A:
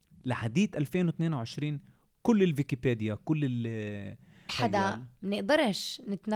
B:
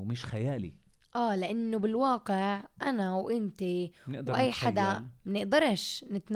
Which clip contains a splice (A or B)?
A